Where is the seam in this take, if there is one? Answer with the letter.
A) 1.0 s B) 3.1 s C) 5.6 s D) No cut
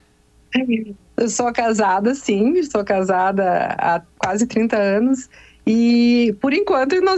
D